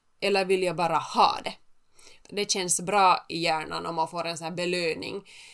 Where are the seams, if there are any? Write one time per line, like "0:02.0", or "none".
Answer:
0:02.2